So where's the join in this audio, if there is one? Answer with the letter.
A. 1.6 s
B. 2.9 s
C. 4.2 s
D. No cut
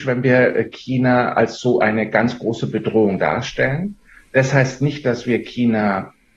D